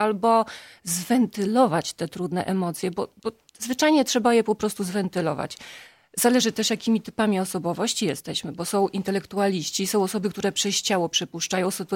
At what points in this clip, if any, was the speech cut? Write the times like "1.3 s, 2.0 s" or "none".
none